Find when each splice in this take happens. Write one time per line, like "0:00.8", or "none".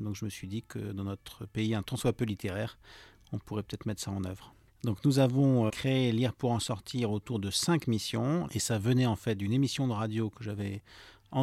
0:05.7
0:08.5